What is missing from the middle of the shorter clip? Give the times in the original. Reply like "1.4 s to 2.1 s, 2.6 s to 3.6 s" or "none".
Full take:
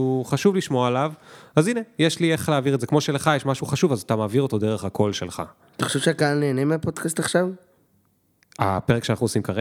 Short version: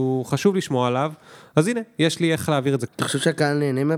2.9 s to 5.7 s

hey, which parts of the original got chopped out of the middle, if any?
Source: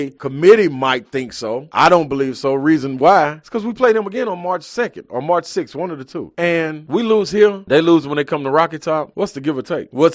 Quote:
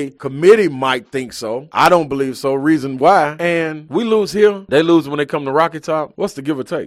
3.4 s to 6.3 s

